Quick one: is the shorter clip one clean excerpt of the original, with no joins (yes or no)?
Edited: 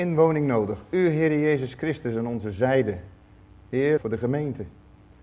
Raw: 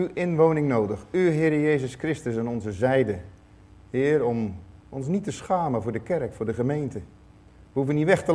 no